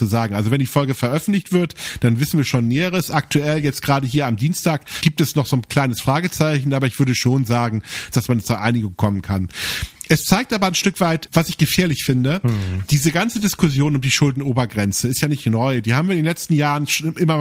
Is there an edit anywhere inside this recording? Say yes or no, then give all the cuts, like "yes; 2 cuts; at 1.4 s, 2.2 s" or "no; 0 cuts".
yes; 1 cut; at 8.1 s